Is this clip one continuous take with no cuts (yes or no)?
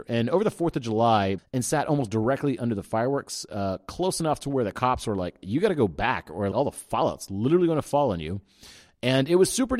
no